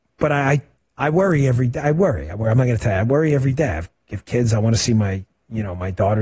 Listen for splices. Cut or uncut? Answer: uncut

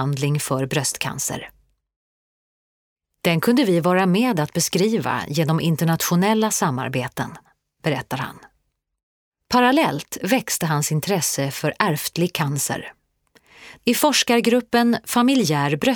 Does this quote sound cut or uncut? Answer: cut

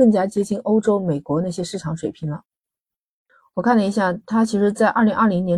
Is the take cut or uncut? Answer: uncut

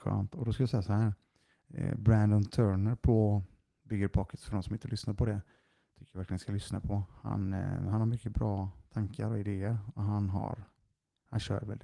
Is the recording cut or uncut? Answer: uncut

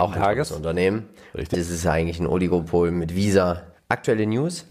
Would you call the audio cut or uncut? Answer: cut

